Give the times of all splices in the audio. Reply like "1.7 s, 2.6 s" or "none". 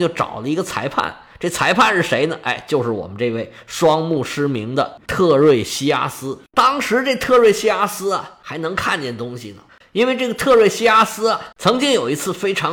9.8 s, 11.5 s